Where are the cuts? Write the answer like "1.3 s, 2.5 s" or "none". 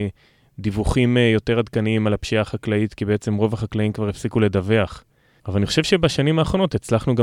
5.4 s